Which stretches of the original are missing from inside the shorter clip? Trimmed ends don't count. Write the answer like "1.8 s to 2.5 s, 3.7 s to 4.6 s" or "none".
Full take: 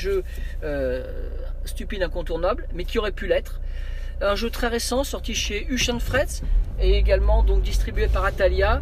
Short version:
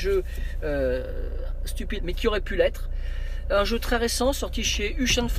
2.0 s to 2.7 s